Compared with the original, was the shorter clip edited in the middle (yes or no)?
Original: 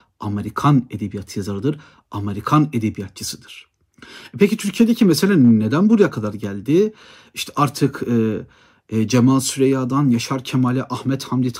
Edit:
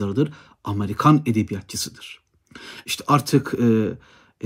yes